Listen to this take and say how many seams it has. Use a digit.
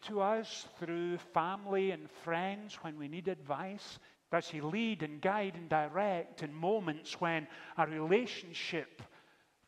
1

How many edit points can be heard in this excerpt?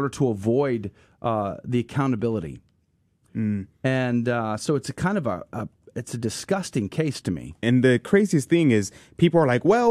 1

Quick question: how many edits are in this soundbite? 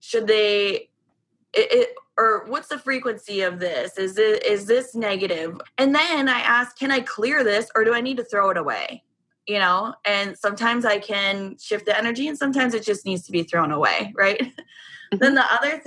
2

